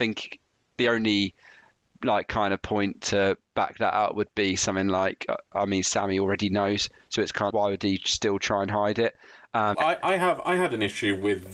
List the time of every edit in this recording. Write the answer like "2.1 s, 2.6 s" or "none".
7.5 s, 9.7 s